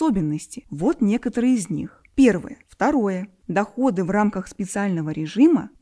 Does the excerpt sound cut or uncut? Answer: cut